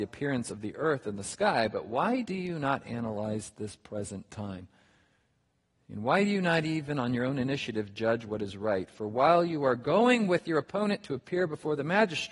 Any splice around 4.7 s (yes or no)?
no